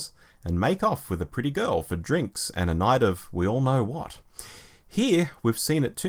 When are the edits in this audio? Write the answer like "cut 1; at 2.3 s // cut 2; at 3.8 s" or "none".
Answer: none